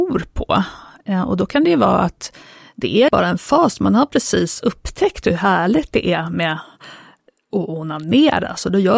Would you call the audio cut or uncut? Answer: cut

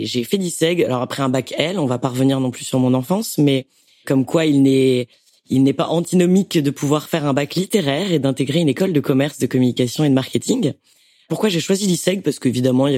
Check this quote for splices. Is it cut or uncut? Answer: uncut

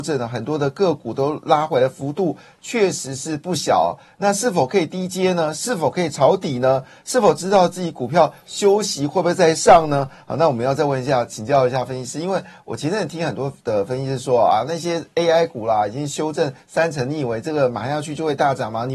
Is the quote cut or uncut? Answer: uncut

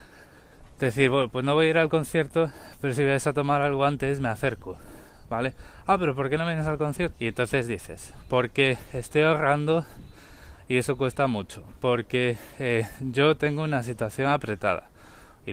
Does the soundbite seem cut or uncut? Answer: cut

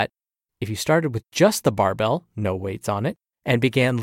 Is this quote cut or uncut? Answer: uncut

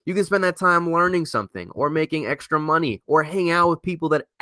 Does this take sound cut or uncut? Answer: uncut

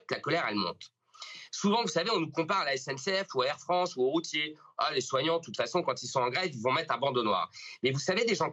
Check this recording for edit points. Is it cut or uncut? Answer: uncut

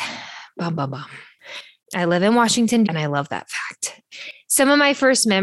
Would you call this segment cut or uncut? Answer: cut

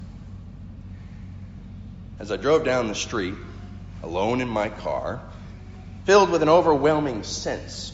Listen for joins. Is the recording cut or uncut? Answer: cut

